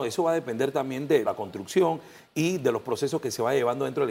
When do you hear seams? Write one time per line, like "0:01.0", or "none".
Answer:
0:01.2